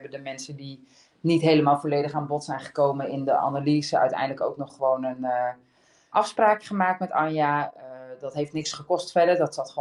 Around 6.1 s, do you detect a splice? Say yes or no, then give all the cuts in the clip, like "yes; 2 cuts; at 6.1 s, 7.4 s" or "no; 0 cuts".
yes; 1 cut; at 6.1 s